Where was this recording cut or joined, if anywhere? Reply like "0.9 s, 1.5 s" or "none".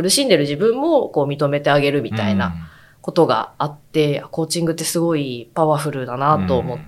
none